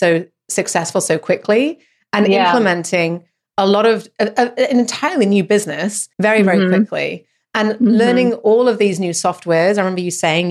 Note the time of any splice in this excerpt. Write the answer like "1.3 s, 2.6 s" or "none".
6.1 s